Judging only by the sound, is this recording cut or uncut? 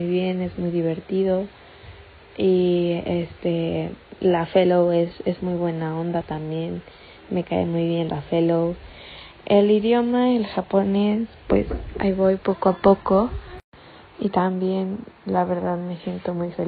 uncut